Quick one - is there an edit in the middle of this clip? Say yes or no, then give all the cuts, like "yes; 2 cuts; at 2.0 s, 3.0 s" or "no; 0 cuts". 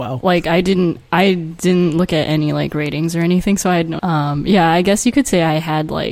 yes; 1 cut; at 4.0 s